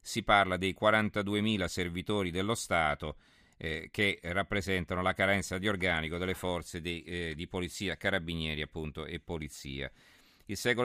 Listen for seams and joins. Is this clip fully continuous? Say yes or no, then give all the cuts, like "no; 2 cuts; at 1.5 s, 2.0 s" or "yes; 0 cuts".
yes; 0 cuts